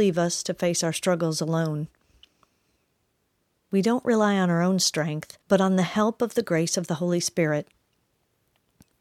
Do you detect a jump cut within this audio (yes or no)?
yes